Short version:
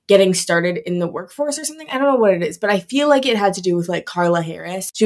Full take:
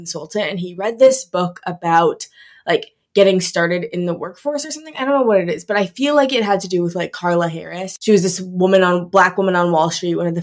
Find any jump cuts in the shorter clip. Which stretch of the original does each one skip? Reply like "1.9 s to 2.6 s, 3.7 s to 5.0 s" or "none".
none